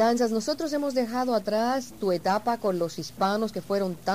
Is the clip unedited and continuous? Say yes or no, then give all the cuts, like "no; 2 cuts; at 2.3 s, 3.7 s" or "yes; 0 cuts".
yes; 0 cuts